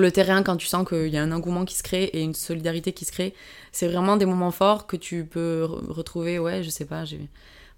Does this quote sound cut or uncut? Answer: uncut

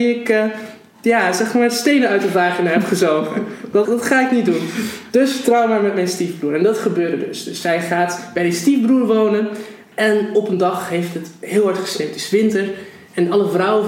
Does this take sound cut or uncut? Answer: cut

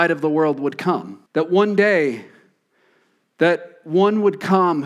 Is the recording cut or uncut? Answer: cut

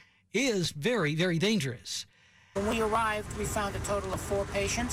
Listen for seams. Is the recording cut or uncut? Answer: cut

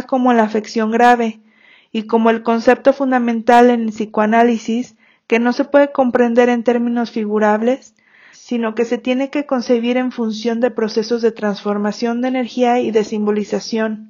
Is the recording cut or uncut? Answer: cut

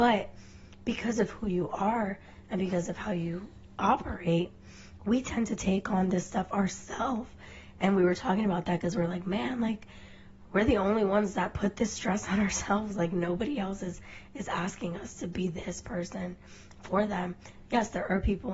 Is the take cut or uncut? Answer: uncut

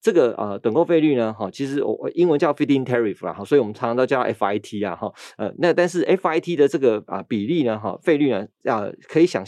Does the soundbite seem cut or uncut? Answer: uncut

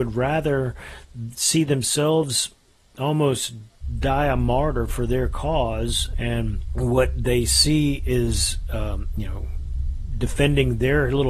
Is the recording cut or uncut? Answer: cut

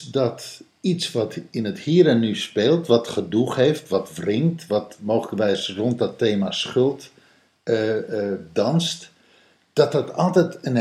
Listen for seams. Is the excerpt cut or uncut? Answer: uncut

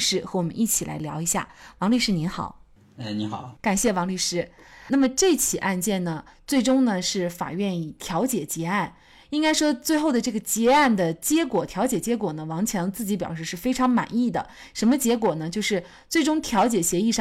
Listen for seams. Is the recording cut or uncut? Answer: uncut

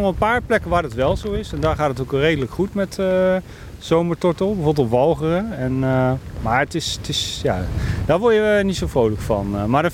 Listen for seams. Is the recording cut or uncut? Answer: uncut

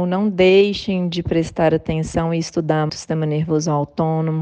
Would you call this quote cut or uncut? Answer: cut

